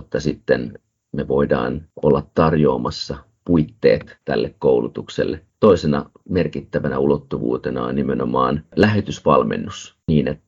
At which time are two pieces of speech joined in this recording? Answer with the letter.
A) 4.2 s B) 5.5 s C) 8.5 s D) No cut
B